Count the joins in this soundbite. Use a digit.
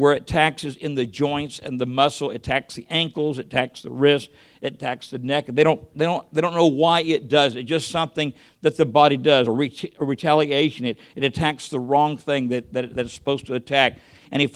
0